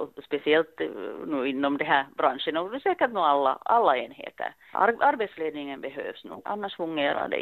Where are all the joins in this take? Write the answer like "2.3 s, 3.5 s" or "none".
4.7 s, 6.4 s